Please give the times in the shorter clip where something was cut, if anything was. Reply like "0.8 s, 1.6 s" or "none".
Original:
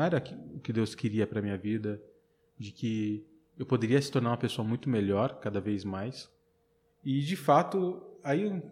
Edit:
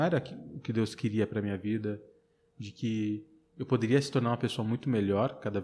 none